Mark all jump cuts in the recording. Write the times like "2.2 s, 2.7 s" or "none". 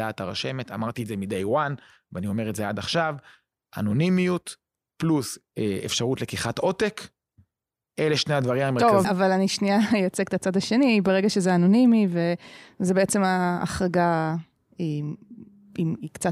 9.0 s